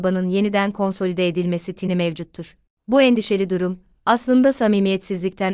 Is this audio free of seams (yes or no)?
no